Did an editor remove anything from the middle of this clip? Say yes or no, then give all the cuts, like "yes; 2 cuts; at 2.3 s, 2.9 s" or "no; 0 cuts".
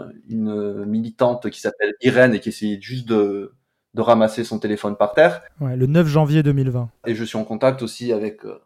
yes; 1 cut; at 7.0 s